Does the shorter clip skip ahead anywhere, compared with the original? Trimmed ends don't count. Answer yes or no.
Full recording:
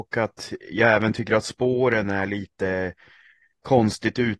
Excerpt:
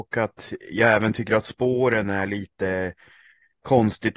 no